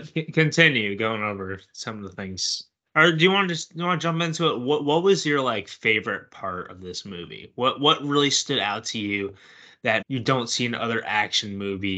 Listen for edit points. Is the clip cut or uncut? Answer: cut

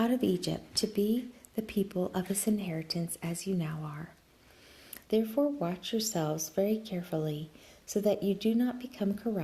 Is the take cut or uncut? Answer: cut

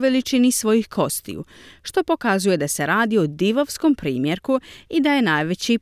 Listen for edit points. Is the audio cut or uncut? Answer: uncut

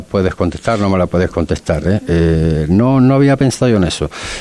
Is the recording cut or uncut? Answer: uncut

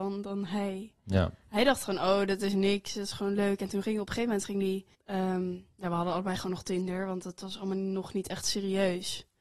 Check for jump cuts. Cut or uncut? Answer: cut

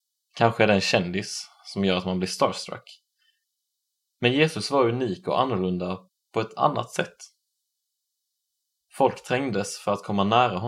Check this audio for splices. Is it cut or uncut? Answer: uncut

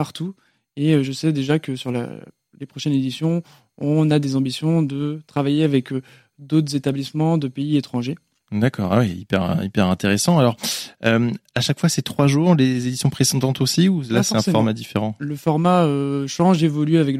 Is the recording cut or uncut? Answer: uncut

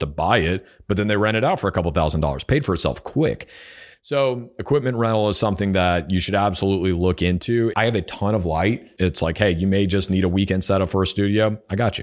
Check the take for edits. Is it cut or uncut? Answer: cut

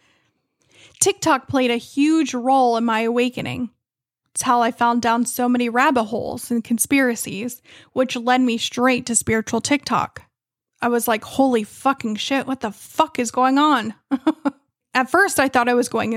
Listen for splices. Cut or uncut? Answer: cut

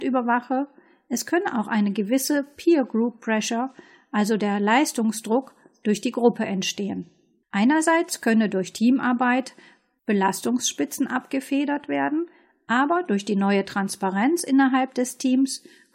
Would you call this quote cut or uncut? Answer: cut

